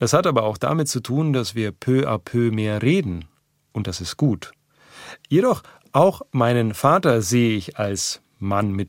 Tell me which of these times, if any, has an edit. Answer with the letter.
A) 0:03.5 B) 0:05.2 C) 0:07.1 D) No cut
B